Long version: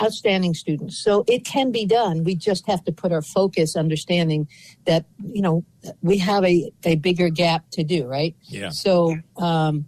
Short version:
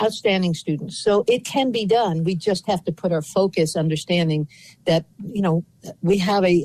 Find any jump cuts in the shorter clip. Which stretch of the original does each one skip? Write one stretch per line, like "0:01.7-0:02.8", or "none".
none